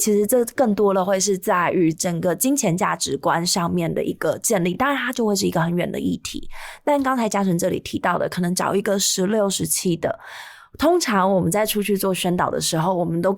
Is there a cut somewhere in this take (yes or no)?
no